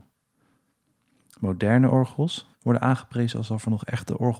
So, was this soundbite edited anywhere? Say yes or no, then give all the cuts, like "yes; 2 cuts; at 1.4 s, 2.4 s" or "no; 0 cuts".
yes; 1 cut; at 2.5 s